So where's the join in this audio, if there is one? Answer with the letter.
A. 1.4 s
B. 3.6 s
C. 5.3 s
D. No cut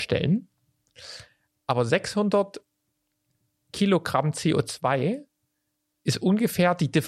D